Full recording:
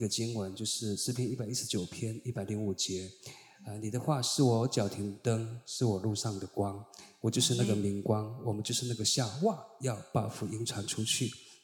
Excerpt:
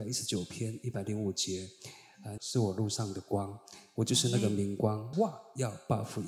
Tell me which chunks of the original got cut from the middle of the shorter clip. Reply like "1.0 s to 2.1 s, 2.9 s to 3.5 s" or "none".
3.8 s to 5.6 s, 8.4 s to 9.4 s